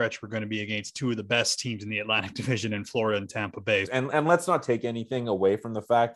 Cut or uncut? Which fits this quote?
cut